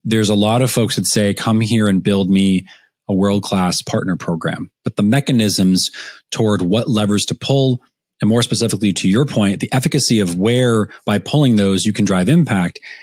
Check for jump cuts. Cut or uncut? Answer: uncut